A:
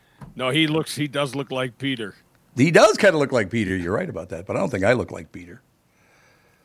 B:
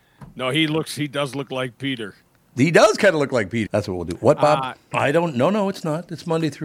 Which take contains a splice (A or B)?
B